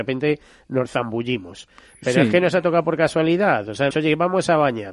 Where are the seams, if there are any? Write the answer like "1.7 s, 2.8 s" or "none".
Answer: 3.9 s